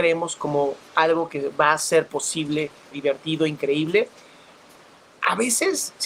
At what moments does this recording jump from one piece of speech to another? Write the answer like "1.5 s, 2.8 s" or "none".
2.9 s